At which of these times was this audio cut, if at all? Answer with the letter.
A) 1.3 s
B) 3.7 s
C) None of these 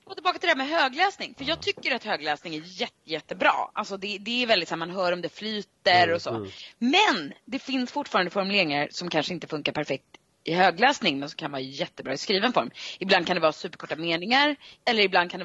C